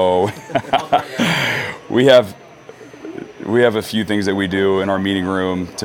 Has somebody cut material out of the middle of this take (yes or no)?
no